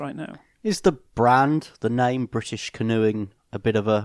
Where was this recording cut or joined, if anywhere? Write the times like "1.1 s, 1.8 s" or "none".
none